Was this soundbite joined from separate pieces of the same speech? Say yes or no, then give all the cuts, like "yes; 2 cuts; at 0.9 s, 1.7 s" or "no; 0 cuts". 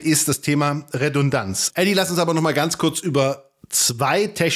yes; 1 cut; at 1.7 s